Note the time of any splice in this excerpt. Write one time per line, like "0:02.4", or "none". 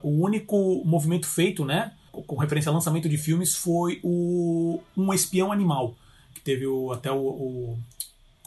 0:02.1